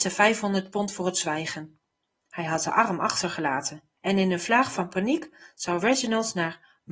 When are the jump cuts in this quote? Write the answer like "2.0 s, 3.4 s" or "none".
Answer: 2.2 s, 4.0 s